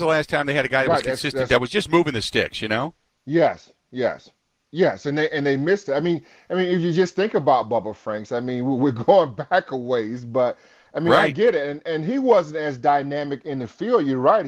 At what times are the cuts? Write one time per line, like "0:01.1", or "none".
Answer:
none